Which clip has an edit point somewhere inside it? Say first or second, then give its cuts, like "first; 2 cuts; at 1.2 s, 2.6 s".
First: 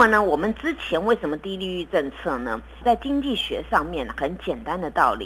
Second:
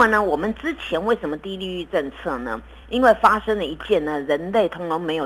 first; 1 cut; at 2.8 s